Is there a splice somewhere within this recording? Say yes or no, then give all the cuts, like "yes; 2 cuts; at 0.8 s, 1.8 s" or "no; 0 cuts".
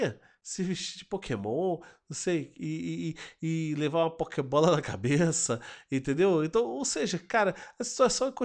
no; 0 cuts